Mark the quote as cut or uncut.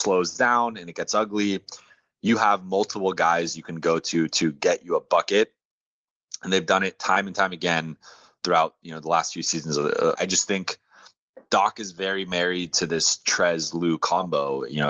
cut